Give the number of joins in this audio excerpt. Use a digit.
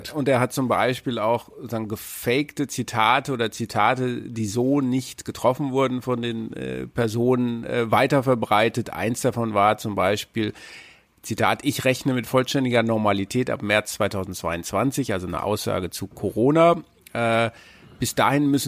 0